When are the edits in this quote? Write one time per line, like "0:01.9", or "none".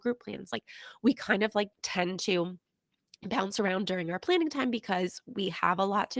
0:01.7